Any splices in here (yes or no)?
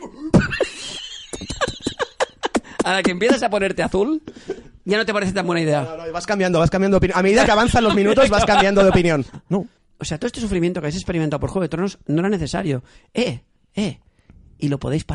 yes